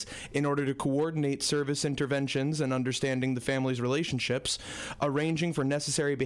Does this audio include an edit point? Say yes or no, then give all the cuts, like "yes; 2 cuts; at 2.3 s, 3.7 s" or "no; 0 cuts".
no; 0 cuts